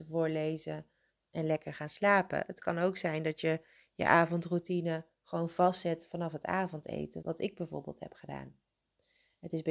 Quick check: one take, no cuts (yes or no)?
no